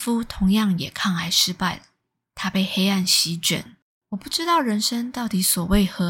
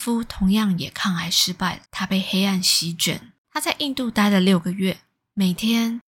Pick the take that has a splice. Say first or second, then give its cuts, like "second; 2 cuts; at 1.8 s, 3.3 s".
second; 2 cuts; at 1.9 s, 3.4 s